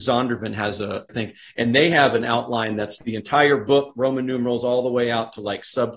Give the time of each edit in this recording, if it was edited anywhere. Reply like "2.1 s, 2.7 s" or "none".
1.1 s, 3.0 s